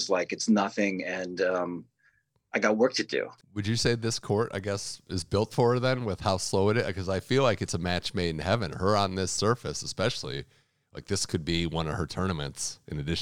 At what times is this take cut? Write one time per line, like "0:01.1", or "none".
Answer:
0:03.4

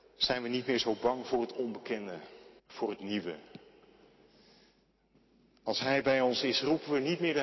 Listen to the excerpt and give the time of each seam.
0:02.6

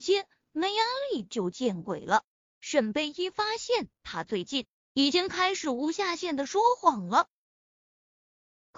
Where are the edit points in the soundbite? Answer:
0:02.5

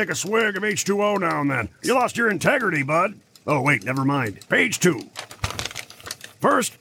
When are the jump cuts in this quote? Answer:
0:01.8
0:04.4

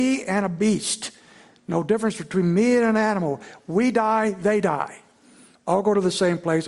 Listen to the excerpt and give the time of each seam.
0:05.6

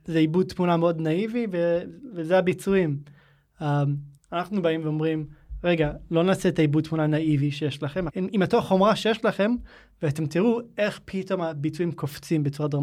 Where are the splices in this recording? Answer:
0:04.2
0:08.1

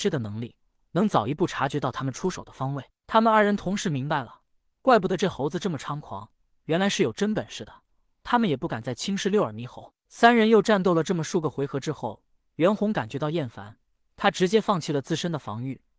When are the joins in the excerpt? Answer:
none

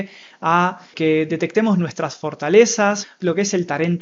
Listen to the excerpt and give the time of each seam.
0:00.9
0:03.0

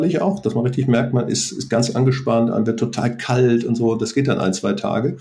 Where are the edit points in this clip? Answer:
none

